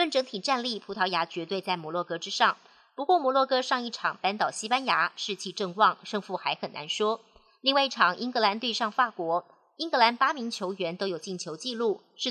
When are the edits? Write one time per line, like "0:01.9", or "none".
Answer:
none